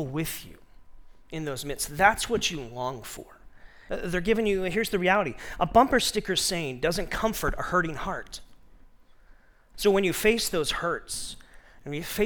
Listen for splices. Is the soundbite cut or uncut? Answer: cut